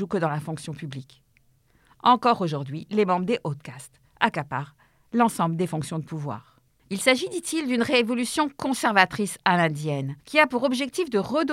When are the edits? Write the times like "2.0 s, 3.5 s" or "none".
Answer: 6.7 s, 10.2 s